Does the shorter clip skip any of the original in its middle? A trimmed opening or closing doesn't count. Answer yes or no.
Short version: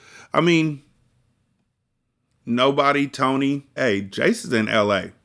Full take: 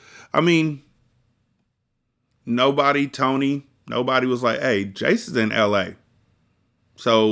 yes